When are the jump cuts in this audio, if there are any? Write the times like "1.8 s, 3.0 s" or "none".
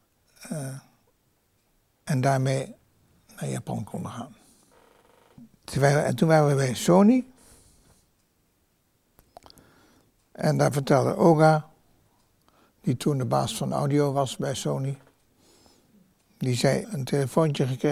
16.8 s